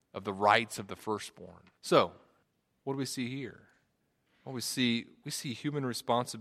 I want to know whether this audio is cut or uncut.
cut